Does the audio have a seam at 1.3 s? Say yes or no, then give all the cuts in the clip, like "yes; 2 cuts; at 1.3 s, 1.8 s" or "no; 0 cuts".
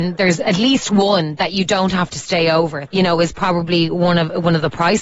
no; 1 cut; at 2.9 s